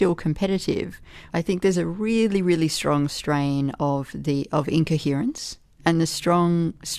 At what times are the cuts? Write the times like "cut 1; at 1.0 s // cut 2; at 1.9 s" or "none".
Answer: cut 1; at 1.3 s // cut 2; at 5.8 s